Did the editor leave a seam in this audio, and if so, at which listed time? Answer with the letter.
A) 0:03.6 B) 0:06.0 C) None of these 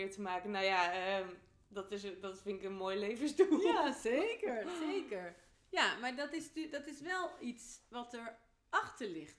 C